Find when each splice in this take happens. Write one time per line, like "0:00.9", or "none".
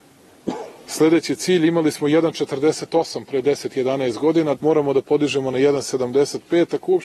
0:04.6